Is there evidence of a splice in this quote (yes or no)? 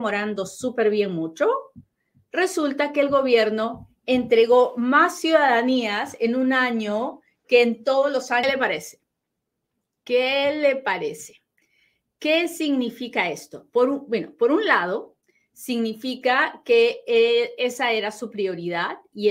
no